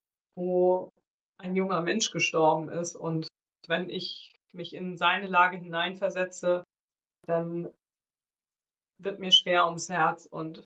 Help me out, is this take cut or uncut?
uncut